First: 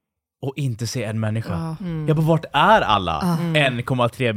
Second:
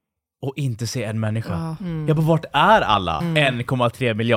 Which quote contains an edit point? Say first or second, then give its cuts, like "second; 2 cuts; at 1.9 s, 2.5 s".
second; 1 cut; at 3.2 s